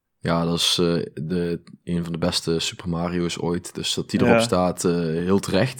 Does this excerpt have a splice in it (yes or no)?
no